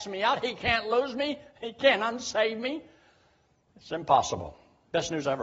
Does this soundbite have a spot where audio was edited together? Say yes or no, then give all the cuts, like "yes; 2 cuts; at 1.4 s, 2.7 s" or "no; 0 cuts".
no; 0 cuts